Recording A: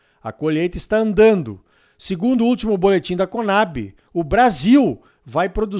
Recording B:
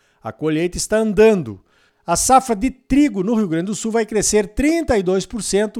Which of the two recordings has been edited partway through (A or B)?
B